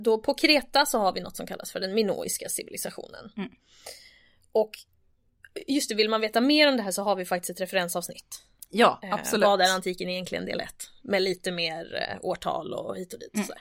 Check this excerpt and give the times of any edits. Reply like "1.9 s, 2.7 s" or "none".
none